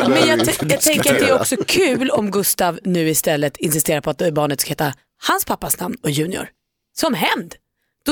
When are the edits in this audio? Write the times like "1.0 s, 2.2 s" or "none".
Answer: none